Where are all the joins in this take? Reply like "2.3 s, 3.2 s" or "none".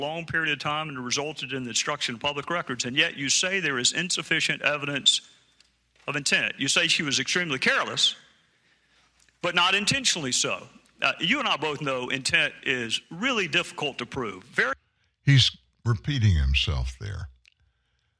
none